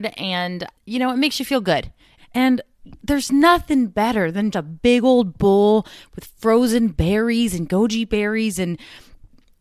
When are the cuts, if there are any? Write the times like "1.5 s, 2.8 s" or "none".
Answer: 2.2 s, 4.5 s